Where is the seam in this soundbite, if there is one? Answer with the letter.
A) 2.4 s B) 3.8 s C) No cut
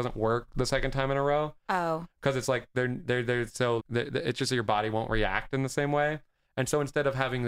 B